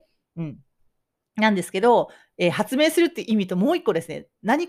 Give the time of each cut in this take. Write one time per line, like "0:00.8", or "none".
none

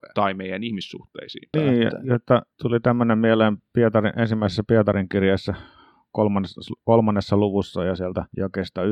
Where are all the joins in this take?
0:01.5

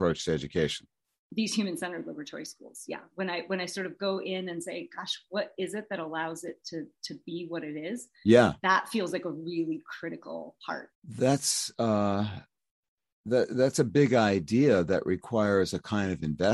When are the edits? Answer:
0:10.9

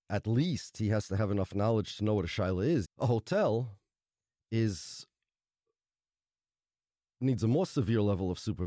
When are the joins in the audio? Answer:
0:02.8

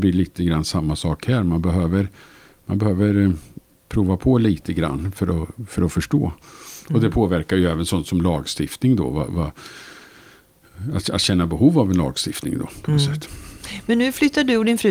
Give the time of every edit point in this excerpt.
none

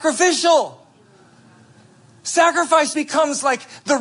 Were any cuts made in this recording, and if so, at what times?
0:02.9

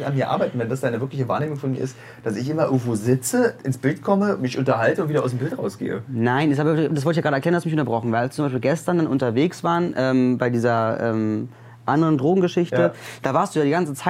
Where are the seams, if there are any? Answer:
none

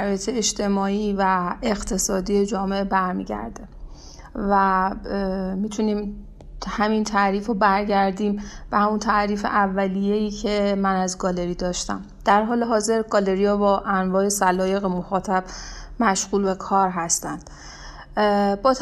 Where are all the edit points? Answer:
none

